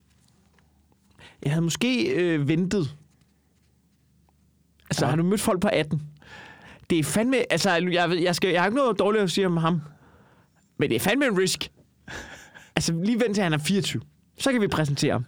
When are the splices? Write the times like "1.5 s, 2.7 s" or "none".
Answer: none